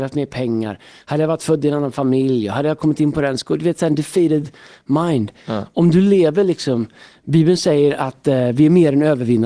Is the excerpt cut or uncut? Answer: uncut